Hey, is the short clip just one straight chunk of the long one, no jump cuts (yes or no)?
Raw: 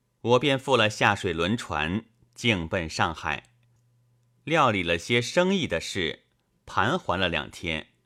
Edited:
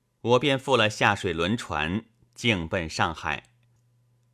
yes